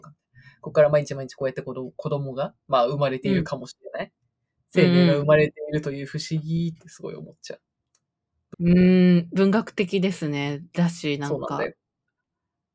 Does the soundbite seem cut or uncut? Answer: cut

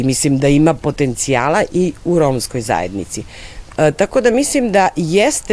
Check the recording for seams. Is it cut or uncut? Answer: cut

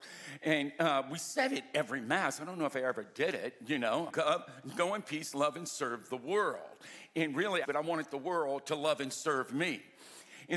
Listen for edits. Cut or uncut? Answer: cut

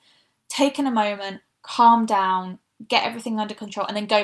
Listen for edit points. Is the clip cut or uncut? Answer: uncut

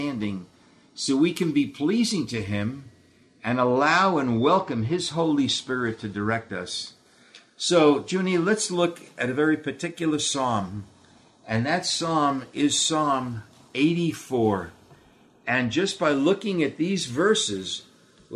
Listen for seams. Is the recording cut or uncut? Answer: uncut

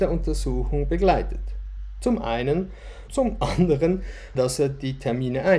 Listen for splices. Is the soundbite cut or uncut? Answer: cut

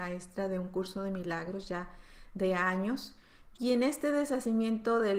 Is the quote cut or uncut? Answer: cut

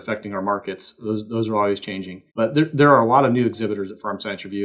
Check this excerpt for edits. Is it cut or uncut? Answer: cut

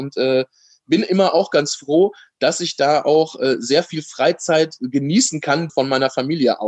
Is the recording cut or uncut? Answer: cut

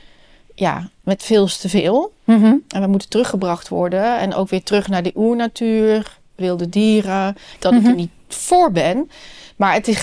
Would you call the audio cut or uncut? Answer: cut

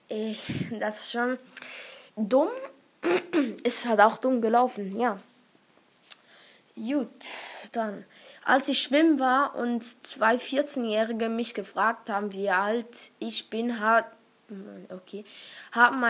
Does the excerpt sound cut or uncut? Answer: uncut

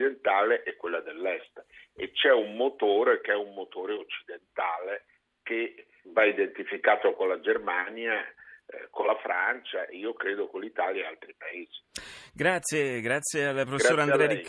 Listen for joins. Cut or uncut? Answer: cut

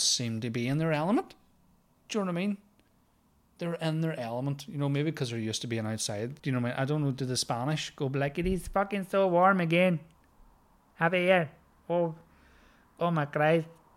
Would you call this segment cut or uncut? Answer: cut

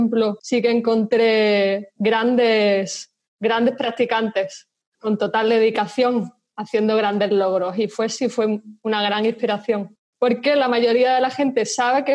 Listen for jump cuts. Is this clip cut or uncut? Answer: cut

